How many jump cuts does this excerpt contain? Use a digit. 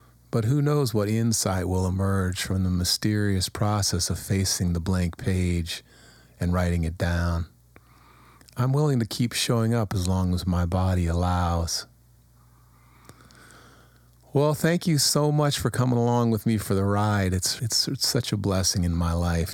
1